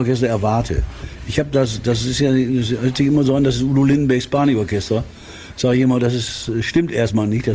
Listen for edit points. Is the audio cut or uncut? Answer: uncut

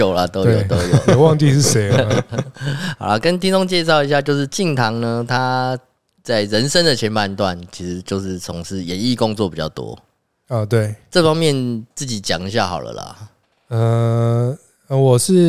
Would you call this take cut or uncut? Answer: uncut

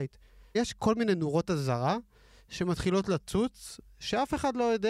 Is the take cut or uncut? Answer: uncut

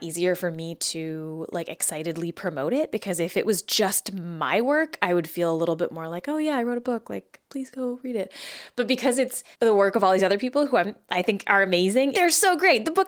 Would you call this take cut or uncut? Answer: cut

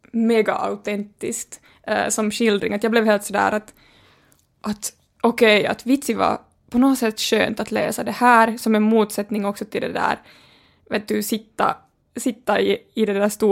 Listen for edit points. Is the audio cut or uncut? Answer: uncut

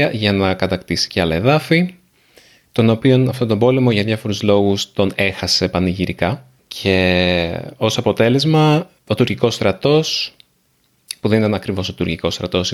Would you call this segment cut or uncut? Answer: uncut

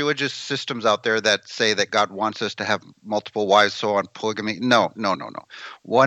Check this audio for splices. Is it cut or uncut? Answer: cut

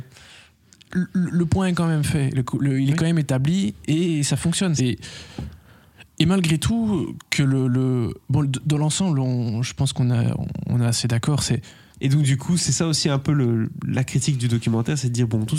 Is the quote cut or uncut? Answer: cut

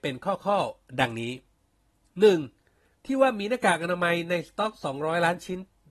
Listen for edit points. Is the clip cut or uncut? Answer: cut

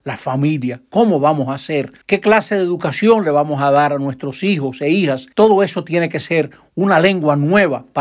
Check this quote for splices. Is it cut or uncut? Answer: cut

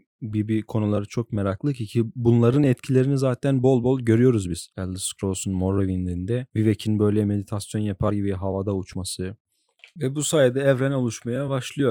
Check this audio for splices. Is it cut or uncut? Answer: uncut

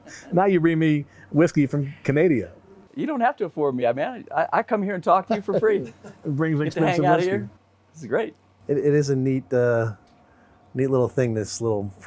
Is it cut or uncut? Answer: uncut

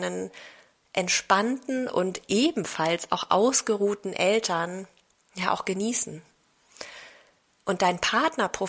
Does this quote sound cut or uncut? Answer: cut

